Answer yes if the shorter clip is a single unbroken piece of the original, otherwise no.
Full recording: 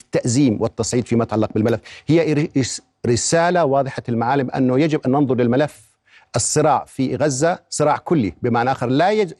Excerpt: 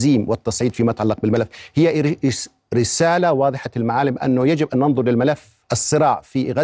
no